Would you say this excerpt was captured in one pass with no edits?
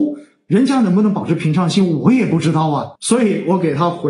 no; 1 cut; at 3.0 s

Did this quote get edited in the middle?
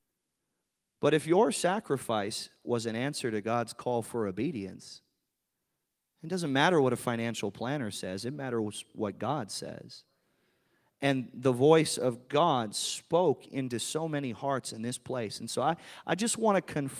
no; 0 cuts

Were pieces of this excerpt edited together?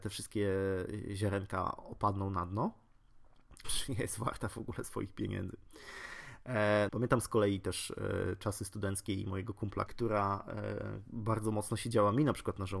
yes; 3 cuts; at 3.6 s, 6.9 s, 9.9 s

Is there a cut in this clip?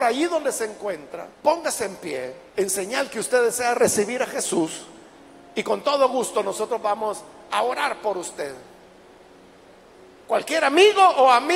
yes; 2 cuts; at 1.3 s, 2.5 s

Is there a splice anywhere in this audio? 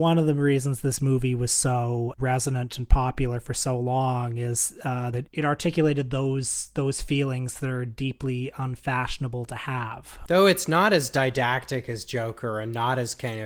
yes; 2 cuts; at 2.2 s, 5.1 s

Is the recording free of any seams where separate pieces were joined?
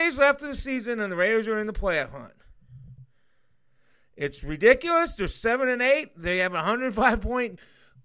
yes; 0 cuts

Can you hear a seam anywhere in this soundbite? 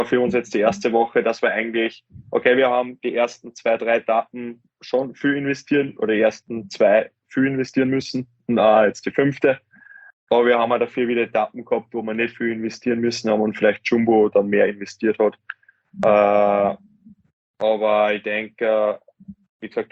no; 0 cuts

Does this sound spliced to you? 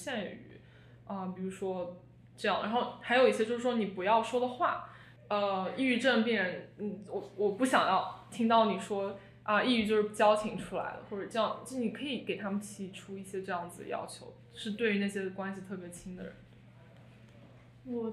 yes; 1 cut; at 5.2 s

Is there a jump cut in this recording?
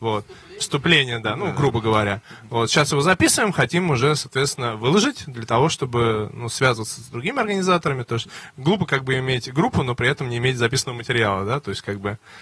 no; 0 cuts

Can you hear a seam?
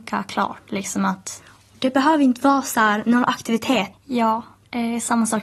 yes; 1 cut; at 3.9 s

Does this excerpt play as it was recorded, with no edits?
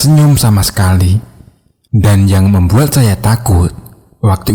no; 1 cut; at 1.9 s

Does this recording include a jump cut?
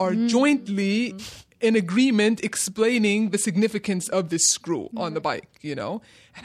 no; 0 cuts

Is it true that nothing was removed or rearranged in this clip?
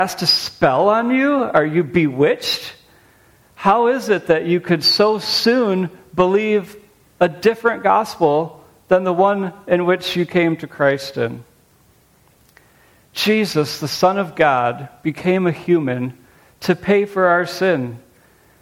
yes; 0 cuts

